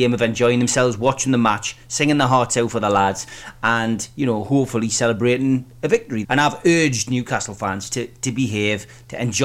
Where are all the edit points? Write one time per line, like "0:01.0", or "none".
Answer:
0:06.2